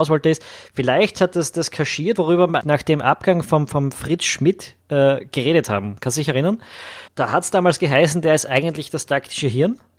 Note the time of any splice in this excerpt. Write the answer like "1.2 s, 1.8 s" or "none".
2.6 s, 4.8 s, 7.1 s